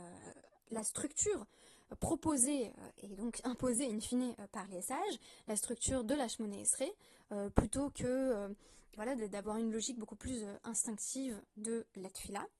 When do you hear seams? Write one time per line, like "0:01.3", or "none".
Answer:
0:09.0